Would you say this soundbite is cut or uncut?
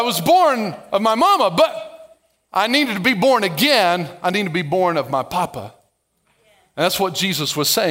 uncut